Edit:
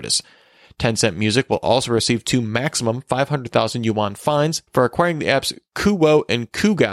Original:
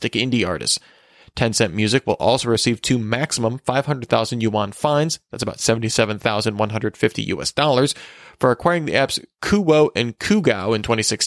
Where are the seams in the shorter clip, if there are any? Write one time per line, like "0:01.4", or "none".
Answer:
0:04.7